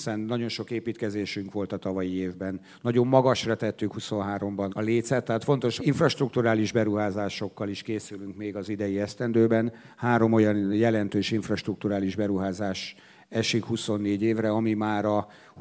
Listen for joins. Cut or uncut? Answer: cut